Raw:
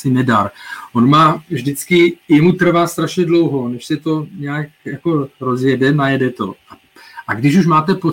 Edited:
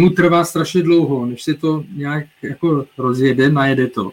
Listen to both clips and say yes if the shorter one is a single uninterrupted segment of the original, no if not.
yes